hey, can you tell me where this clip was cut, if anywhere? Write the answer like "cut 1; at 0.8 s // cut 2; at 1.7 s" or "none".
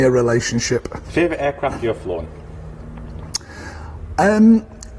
cut 1; at 1.0 s